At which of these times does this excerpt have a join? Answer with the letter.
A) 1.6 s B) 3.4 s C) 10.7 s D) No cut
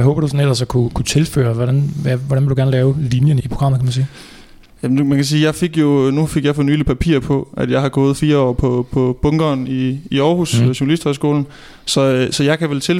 B